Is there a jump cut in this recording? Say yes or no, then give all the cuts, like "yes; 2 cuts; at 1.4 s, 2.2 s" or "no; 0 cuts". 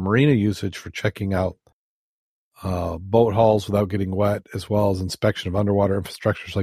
no; 0 cuts